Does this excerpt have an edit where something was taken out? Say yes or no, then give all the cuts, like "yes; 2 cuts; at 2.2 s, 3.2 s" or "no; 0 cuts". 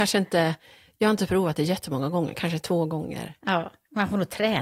no; 0 cuts